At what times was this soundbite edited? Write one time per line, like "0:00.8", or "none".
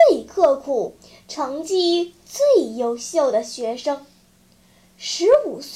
none